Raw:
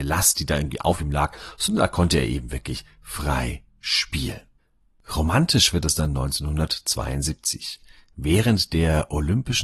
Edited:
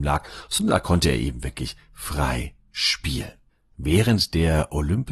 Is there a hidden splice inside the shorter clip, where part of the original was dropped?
yes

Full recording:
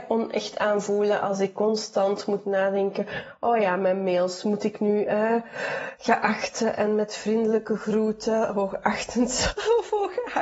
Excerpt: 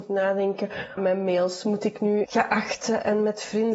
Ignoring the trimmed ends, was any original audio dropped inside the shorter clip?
yes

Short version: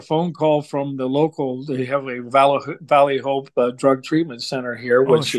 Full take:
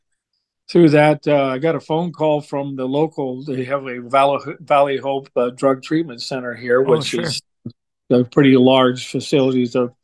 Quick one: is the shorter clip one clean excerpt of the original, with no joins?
yes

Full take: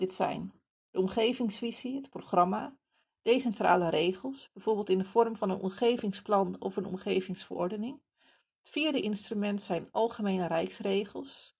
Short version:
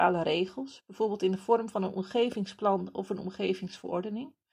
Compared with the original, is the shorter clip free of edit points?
yes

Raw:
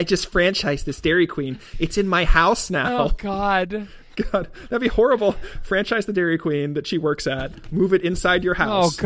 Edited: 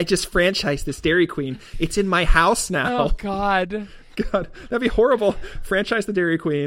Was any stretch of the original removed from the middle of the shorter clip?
no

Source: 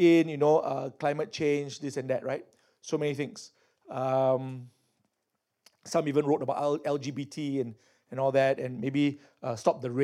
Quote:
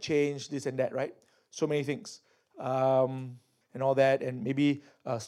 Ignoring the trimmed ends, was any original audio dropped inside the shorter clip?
yes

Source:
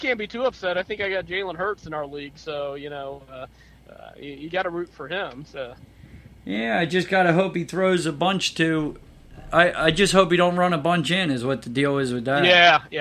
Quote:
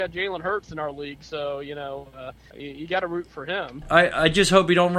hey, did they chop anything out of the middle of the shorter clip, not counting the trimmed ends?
yes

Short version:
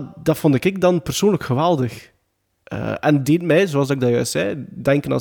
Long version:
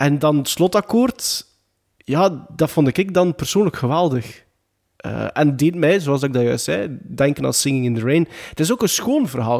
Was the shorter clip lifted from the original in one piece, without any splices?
yes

